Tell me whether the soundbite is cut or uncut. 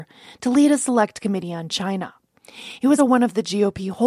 cut